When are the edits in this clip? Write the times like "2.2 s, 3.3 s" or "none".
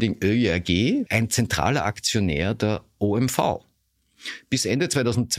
1.1 s

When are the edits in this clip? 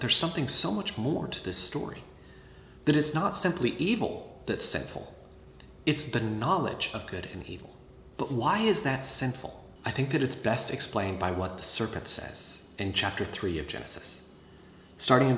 8.1 s

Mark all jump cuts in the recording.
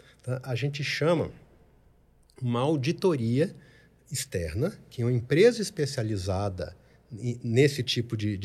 none

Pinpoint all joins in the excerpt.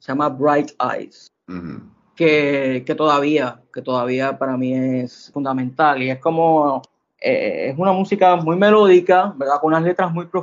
none

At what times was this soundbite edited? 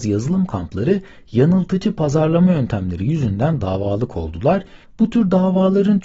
4.8 s

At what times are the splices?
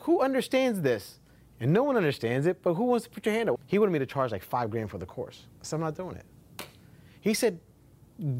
3.6 s

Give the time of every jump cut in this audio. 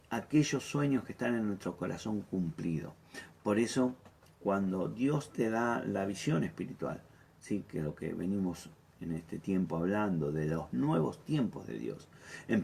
none

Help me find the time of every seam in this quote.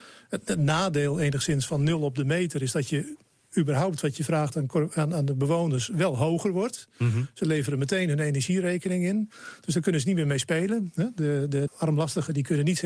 11.7 s

